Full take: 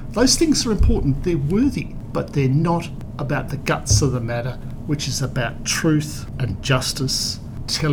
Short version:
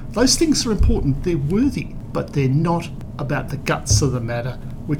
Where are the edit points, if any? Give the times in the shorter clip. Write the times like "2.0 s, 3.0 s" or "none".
none